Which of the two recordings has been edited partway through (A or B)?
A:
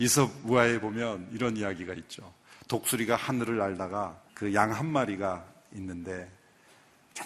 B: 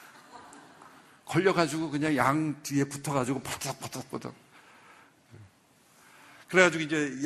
A